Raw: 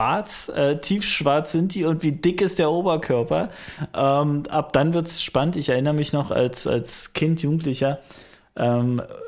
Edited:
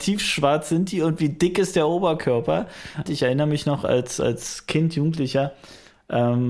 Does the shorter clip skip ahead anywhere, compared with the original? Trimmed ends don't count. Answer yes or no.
yes